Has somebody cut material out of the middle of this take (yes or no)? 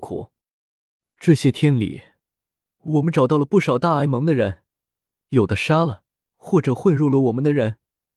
yes